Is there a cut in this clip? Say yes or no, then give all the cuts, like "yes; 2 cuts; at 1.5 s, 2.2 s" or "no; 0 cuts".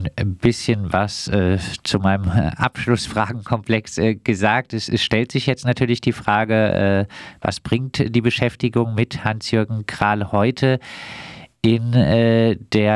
no; 0 cuts